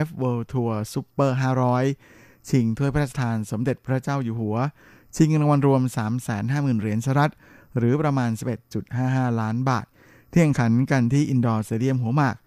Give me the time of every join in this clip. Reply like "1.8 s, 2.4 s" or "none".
none